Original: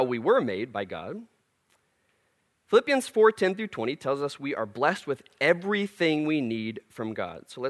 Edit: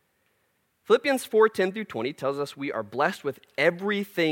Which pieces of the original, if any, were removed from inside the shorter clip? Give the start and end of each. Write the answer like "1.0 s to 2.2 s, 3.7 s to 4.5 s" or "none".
none